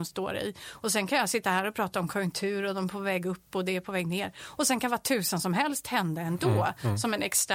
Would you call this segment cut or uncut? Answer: uncut